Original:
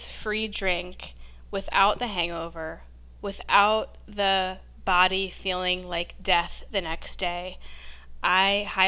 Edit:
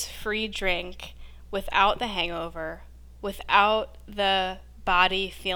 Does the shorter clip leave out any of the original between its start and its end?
no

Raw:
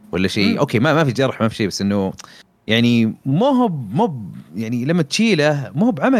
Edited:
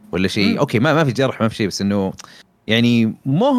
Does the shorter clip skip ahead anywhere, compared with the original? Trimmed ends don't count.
no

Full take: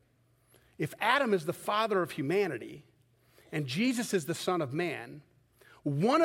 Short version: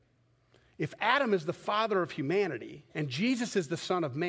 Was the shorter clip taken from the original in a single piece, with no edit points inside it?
no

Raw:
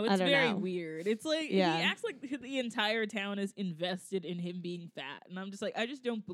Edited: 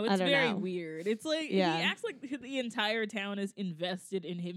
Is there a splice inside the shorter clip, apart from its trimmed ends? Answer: no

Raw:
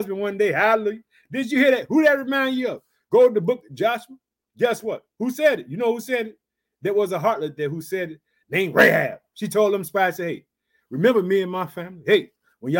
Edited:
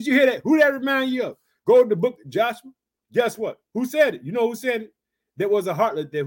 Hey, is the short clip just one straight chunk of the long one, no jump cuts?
yes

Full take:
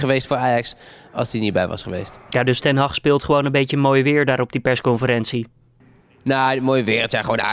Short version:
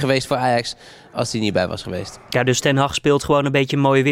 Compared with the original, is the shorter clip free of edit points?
yes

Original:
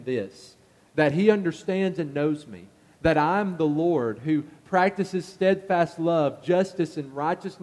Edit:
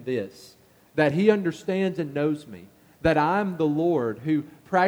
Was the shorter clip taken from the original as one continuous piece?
yes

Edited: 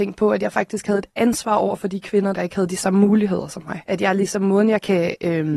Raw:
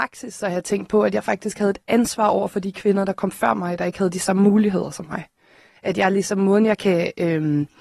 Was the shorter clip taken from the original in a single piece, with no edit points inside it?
no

